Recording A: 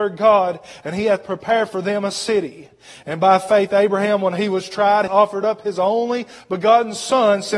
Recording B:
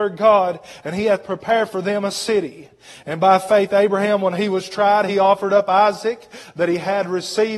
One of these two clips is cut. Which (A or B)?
A